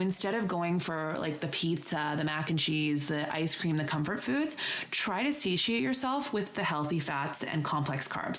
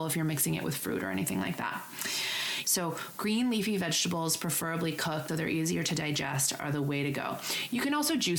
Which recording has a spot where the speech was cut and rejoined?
second; 2 cuts; at 2.6 s, 5.3 s

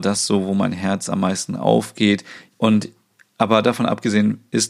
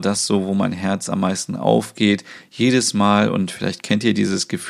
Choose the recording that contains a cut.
first; 1 cut; at 2.5 s

